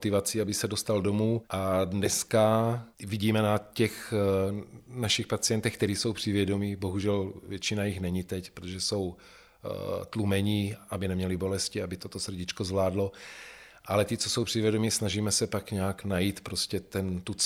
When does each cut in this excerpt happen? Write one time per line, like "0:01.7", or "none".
none